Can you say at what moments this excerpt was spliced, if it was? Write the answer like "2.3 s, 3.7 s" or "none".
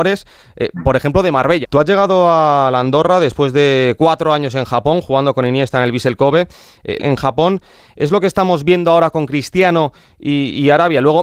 1.6 s, 7.0 s